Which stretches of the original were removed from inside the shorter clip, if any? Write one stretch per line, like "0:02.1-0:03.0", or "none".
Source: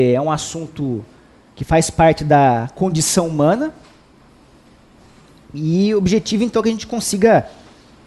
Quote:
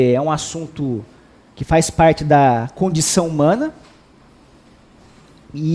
none